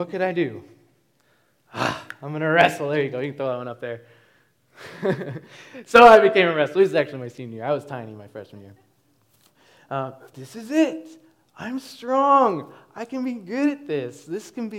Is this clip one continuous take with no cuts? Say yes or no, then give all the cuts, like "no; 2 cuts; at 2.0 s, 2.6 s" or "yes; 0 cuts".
no; 1 cut; at 10.3 s